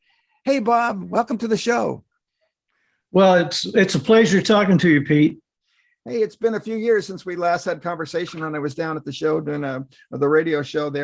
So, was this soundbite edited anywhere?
no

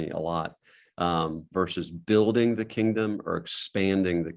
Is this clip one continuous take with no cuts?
no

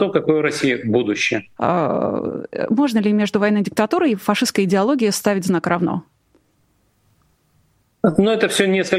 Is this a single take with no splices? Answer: no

